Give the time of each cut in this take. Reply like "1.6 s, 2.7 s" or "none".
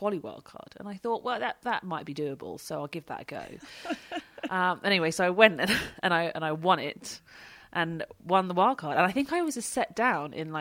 none